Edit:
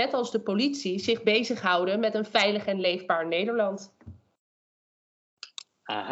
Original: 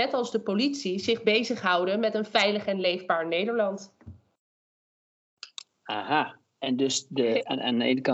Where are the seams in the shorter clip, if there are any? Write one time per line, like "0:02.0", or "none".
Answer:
none